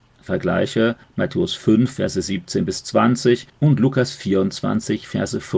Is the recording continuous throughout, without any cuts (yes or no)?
yes